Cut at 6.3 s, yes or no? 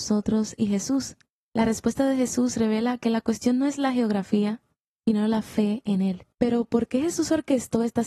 yes